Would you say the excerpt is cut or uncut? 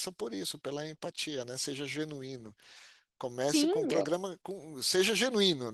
uncut